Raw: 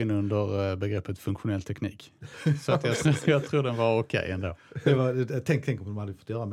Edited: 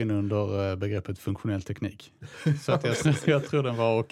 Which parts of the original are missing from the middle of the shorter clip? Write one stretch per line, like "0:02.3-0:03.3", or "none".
none